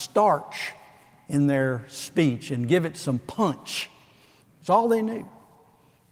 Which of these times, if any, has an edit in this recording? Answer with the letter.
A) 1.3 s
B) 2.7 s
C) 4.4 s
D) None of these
C